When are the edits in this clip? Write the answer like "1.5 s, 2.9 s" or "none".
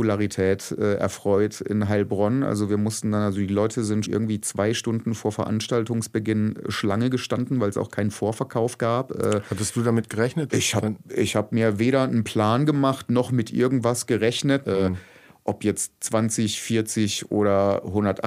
4.1 s, 10.5 s, 14.6 s